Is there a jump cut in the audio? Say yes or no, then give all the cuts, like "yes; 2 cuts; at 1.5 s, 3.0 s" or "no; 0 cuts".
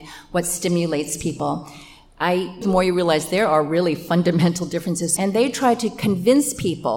yes; 2 cuts; at 2.6 s, 5.2 s